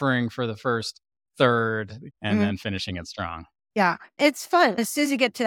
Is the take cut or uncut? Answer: cut